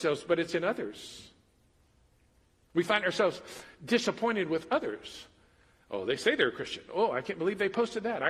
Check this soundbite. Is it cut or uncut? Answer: uncut